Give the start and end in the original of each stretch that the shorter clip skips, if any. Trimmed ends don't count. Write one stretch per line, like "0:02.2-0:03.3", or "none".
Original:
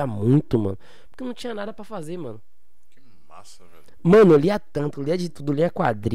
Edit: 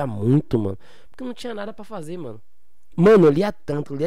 0:02.9-0:04.0